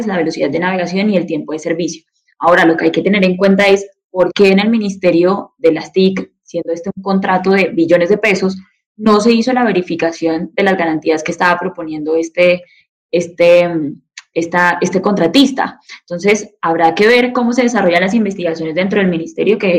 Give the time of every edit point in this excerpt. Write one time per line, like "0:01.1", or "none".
none